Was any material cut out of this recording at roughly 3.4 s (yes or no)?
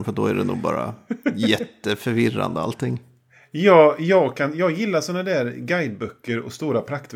no